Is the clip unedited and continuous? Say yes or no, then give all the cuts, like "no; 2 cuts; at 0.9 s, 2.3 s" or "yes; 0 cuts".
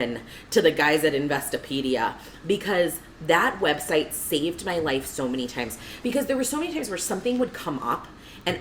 yes; 0 cuts